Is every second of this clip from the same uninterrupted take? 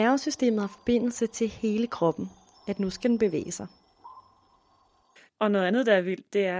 no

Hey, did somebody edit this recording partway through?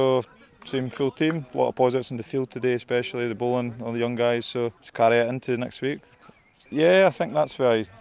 yes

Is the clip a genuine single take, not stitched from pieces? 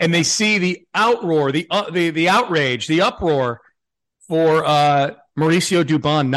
yes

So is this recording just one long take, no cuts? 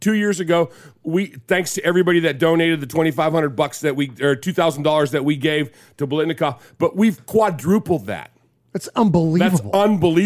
yes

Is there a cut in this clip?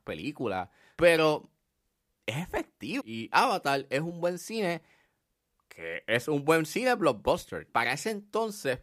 yes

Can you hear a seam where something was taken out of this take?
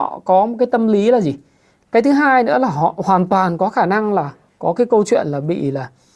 yes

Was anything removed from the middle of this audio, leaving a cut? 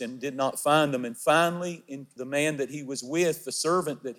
yes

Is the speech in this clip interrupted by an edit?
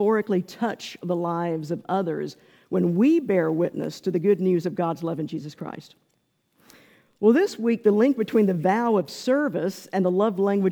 no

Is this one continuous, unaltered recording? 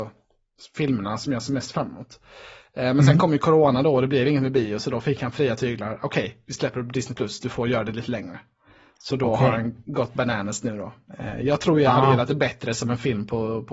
yes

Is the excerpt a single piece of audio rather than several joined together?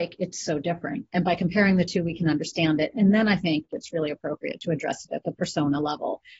yes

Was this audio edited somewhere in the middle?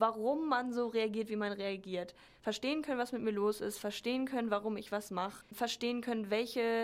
yes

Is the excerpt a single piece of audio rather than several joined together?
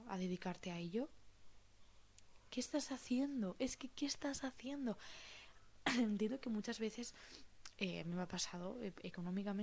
yes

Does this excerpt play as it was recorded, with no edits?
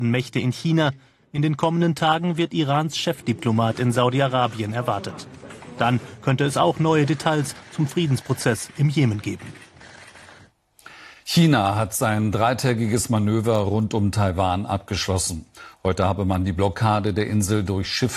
yes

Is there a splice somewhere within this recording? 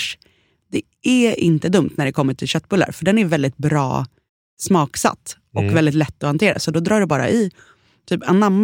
no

